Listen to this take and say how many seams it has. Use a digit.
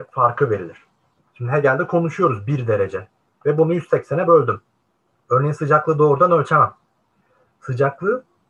3